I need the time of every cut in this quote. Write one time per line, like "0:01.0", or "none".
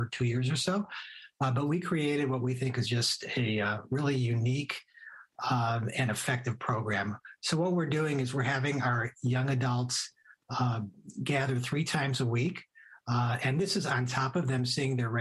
none